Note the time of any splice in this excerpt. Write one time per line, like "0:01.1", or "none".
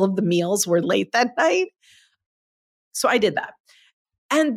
none